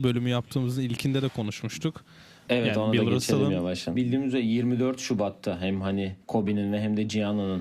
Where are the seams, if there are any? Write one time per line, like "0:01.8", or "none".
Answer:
0:02.5
0:04.0
0:06.2